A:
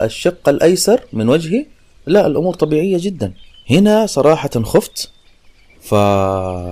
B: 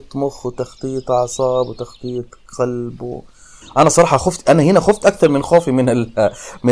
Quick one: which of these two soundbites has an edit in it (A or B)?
B